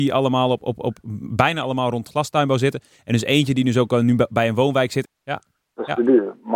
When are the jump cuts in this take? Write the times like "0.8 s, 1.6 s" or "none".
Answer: 5.0 s